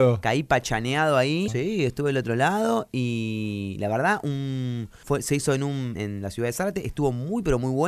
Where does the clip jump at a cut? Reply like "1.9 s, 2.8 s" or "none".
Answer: 1.5 s, 5.9 s